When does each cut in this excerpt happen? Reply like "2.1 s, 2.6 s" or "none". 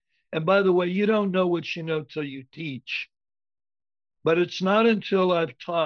4.1 s